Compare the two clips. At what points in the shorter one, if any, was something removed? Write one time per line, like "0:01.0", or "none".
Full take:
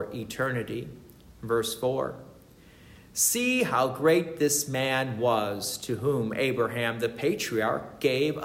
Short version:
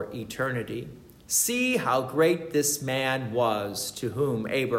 0:01.3